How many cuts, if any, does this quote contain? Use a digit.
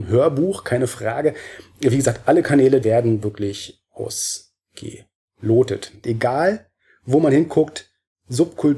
2